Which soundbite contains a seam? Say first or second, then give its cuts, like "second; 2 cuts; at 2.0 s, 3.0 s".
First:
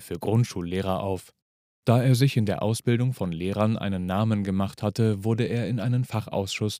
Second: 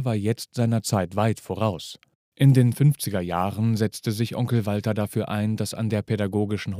second; 1 cut; at 2.3 s